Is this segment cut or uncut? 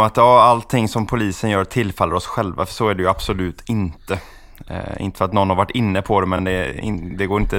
uncut